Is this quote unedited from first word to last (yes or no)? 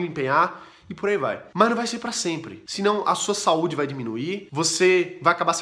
yes